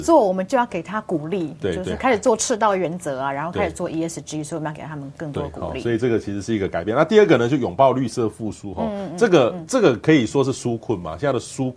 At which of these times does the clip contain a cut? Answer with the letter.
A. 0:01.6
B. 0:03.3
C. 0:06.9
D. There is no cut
A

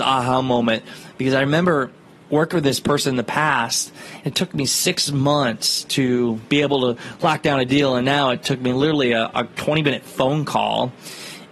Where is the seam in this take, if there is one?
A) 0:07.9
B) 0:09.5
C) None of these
B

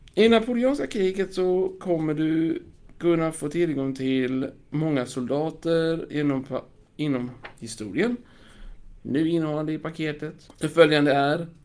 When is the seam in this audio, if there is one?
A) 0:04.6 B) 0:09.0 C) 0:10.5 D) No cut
B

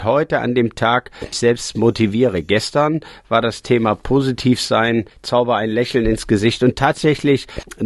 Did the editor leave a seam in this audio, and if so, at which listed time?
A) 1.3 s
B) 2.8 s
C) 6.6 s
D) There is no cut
A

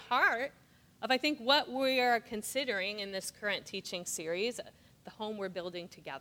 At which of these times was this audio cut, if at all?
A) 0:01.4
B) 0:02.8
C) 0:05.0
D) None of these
C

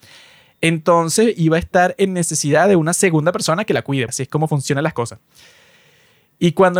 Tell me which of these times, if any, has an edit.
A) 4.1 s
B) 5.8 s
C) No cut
A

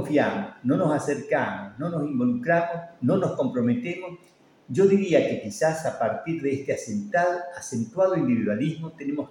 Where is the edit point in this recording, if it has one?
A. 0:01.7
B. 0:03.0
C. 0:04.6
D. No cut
D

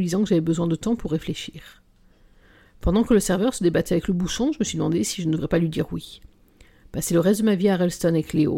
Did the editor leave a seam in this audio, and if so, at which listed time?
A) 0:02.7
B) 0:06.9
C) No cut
C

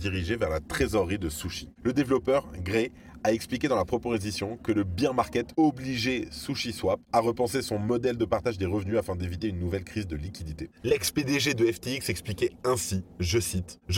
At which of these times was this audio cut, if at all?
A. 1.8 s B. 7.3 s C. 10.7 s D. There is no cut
C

